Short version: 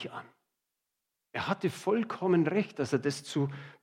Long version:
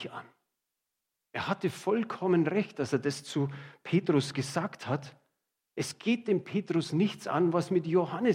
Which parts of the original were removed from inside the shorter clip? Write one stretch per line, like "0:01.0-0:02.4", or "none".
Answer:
none